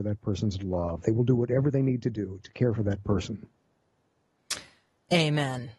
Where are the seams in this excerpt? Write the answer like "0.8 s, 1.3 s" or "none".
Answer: none